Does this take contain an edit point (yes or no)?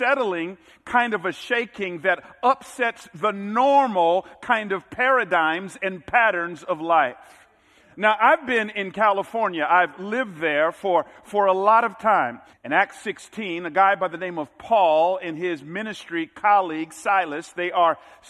yes